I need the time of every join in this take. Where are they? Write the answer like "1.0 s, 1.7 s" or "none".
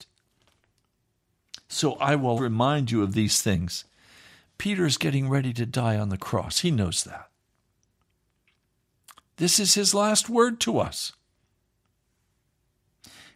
2.4 s